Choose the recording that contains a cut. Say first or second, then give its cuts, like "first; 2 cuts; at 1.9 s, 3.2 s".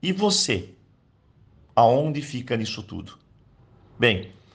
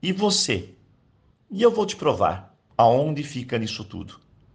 second; 2 cuts; at 1.3 s, 2.7 s